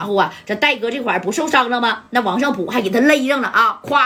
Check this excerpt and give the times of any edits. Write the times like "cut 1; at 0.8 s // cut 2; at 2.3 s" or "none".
none

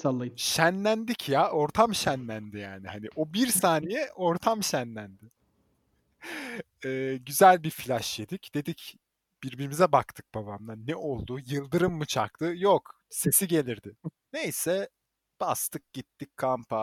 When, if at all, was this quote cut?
cut 1; at 14.2 s

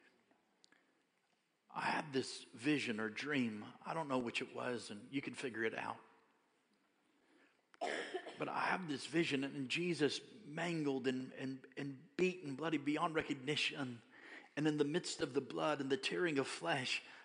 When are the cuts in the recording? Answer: none

